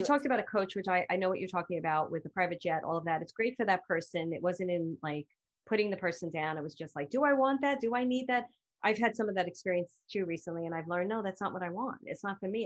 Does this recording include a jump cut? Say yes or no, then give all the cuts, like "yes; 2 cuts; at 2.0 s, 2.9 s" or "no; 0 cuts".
no; 0 cuts